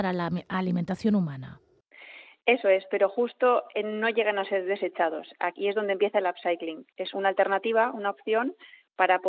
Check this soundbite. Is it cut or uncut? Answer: cut